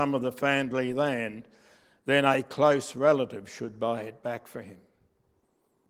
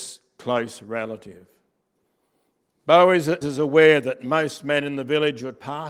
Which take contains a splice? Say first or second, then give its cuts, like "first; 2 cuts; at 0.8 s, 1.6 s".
second; 1 cut; at 3.4 s